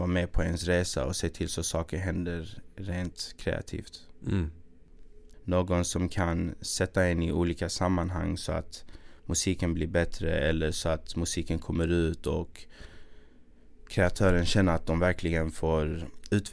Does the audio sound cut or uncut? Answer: cut